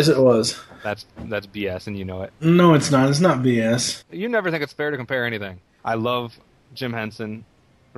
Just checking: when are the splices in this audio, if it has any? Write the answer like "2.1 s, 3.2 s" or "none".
4.0 s, 5.8 s